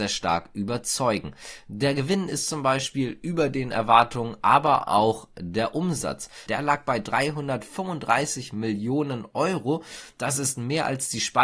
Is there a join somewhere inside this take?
yes; 1 cut; at 6.5 s

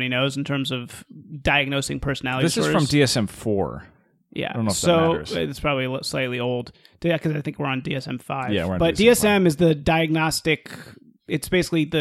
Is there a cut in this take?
no; 0 cuts

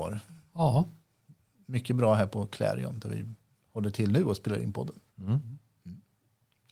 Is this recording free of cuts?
yes; 0 cuts

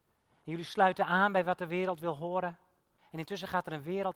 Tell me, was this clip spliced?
yes; 1 cut; at 3.0 s

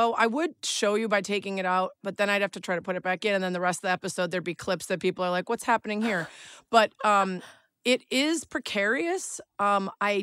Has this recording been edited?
no; 0 cuts

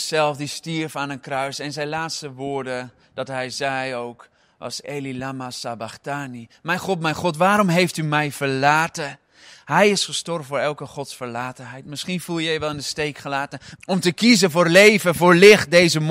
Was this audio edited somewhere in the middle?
yes; 2 cuts; at 4.8 s, 13.8 s

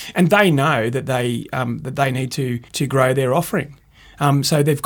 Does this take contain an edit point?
yes; 1 cut; at 2.7 s

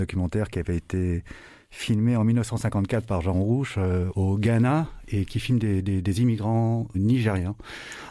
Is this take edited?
no; 0 cuts

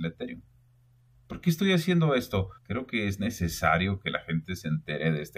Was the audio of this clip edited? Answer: yes; 1 cut; at 2.6 s

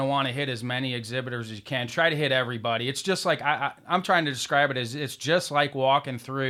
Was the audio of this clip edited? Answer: no; 0 cuts

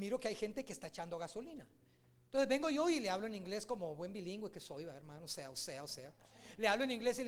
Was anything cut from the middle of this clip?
no; 0 cuts

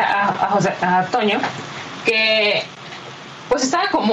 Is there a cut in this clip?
no; 0 cuts

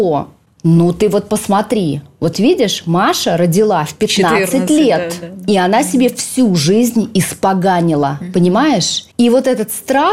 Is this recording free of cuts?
yes; 0 cuts

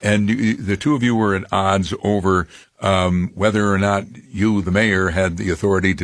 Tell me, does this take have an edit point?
no; 0 cuts

